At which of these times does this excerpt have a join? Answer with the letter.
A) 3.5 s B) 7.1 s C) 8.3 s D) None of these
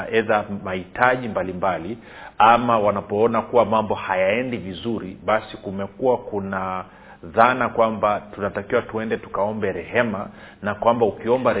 D